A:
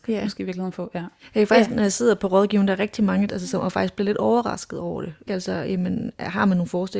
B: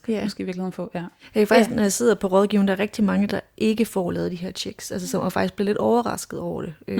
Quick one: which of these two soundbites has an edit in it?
A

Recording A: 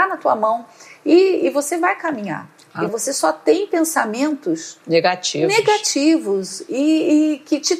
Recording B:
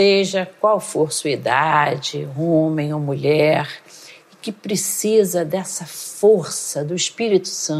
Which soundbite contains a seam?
A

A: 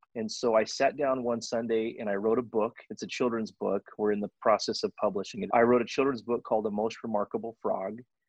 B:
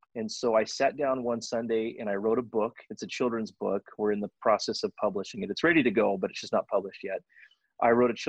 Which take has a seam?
A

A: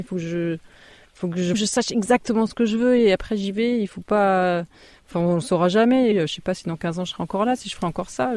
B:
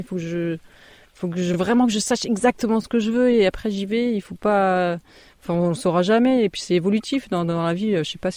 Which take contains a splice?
A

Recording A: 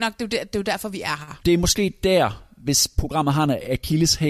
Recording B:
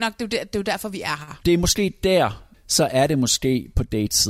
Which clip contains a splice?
B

